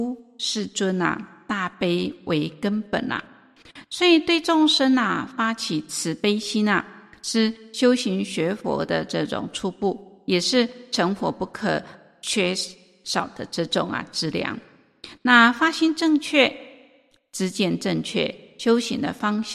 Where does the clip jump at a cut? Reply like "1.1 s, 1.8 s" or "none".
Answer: none